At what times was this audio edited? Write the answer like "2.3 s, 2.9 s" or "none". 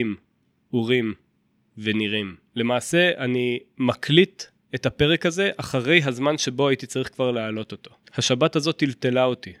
2.5 s